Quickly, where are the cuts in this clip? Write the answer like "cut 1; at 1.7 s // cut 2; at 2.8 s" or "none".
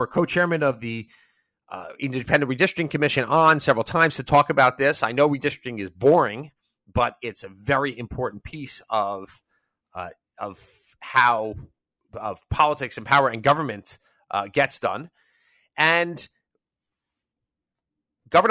none